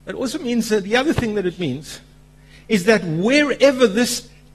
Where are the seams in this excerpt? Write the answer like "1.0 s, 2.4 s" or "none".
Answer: none